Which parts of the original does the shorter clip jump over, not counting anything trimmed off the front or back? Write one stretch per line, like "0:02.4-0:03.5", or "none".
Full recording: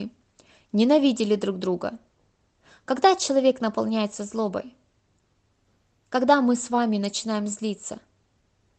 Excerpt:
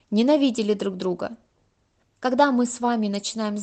0:02.6-0:05.9